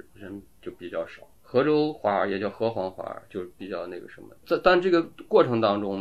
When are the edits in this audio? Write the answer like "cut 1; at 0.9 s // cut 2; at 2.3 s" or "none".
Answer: cut 1; at 4.4 s